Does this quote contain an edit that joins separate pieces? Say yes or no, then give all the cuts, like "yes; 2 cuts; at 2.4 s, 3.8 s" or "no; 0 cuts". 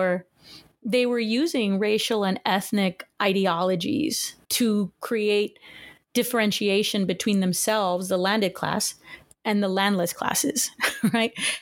yes; 1 cut; at 4.4 s